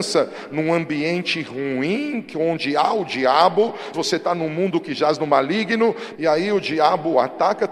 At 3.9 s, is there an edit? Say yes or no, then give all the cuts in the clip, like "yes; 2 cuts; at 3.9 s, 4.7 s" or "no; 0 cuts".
yes; 2 cuts; at 3.9 s, 6.1 s